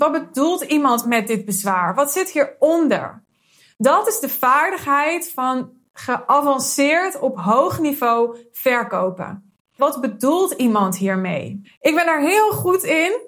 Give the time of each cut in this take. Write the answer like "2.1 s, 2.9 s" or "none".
9.8 s, 11.6 s